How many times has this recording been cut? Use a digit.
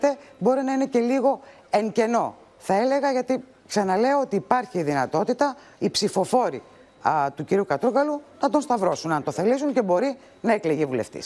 0